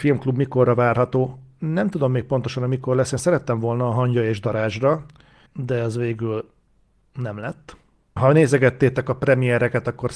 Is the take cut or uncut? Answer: cut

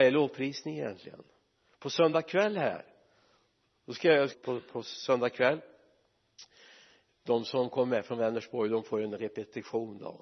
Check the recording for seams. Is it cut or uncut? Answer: cut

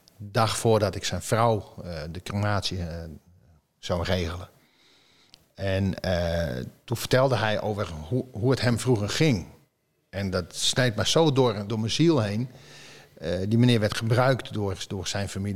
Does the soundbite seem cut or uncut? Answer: cut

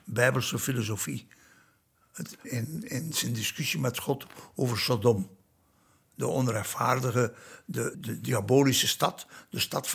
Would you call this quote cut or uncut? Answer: cut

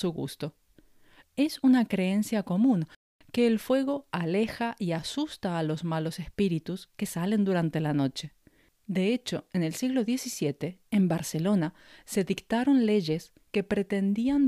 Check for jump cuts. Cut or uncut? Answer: cut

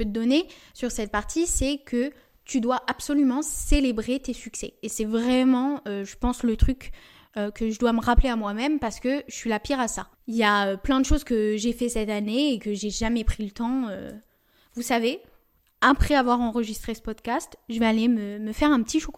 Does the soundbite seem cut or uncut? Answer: uncut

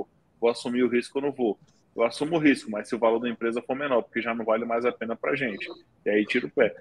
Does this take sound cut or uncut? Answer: uncut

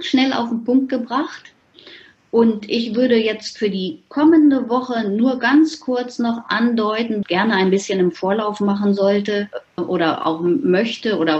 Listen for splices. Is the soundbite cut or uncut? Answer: cut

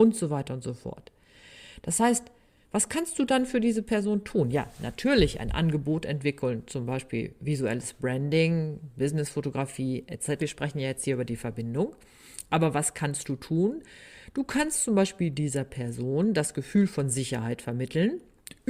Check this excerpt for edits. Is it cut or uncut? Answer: cut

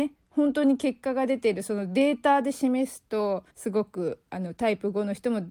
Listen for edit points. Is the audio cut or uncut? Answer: cut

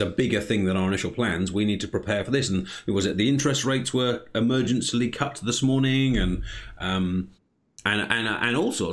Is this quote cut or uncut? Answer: uncut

